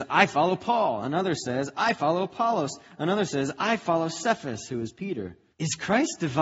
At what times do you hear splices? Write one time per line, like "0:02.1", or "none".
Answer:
0:05.5